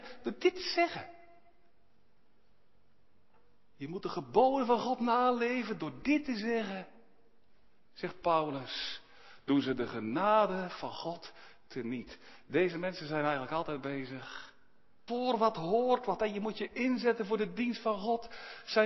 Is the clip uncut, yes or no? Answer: no